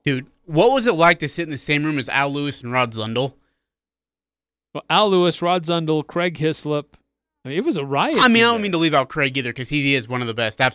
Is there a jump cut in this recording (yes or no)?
no